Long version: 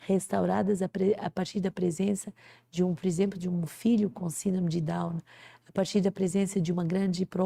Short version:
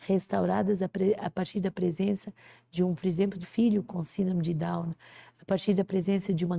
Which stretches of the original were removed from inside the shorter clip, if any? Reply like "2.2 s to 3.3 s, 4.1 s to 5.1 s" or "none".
3.4 s to 3.7 s